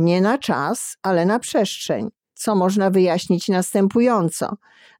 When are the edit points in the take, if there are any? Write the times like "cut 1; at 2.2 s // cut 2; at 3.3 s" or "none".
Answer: none